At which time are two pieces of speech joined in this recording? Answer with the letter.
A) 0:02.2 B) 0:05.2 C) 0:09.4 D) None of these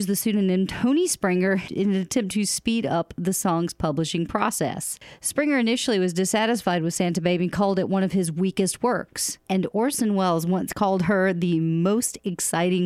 C